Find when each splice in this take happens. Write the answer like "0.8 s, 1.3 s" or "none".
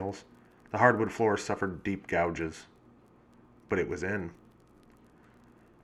none